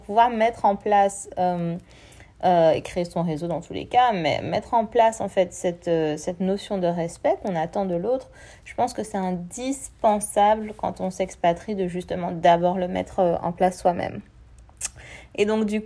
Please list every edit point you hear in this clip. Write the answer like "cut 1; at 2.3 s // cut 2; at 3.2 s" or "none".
none